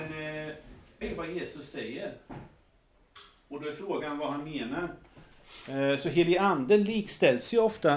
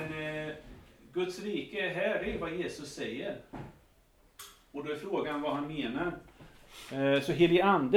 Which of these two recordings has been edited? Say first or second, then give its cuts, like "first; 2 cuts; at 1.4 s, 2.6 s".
first; 1 cut; at 1.0 s